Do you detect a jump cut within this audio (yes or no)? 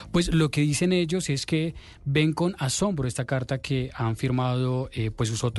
no